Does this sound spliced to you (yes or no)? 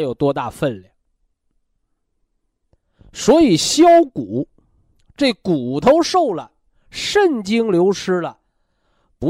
no